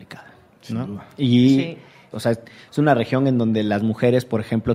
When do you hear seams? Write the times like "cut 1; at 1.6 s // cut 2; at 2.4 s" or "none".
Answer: cut 1; at 2.1 s